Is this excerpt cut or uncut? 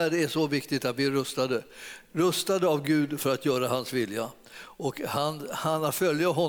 uncut